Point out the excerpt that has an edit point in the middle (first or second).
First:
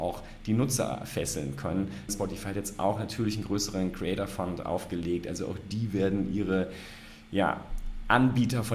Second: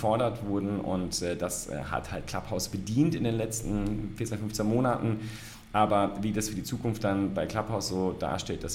first